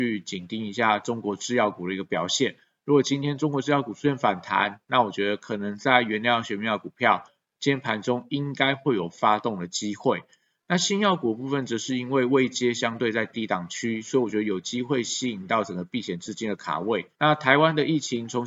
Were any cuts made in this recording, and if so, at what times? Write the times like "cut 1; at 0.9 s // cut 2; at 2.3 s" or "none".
cut 1; at 17.1 s